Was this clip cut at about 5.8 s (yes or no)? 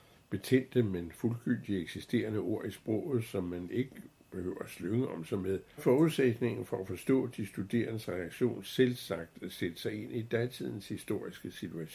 yes